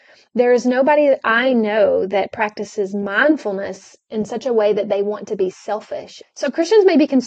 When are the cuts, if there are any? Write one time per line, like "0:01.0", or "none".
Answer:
0:06.2